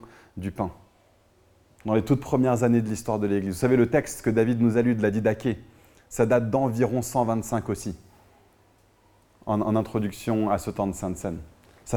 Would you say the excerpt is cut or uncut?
uncut